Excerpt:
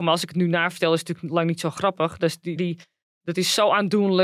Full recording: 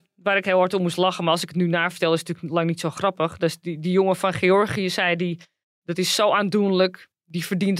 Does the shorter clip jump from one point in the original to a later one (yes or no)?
yes